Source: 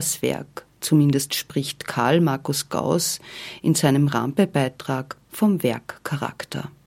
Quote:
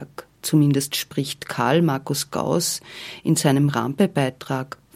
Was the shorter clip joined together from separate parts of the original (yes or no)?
no